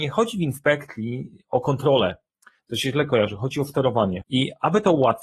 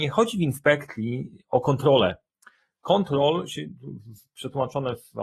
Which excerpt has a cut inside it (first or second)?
first